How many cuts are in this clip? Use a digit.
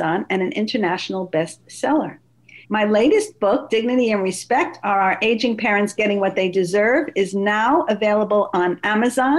1